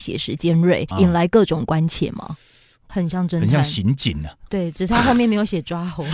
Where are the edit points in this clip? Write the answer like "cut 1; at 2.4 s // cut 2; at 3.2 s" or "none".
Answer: cut 1; at 0.9 s // cut 2; at 2.9 s